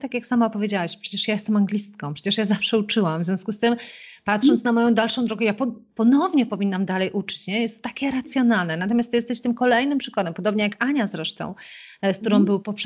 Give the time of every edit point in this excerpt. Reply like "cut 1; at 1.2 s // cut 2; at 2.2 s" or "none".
none